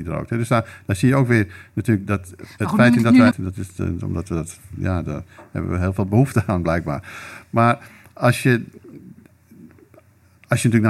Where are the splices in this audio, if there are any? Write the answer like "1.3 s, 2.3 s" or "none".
3.3 s